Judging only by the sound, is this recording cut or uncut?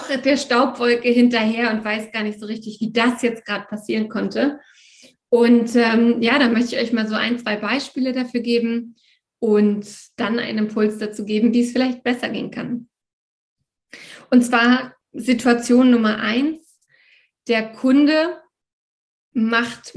uncut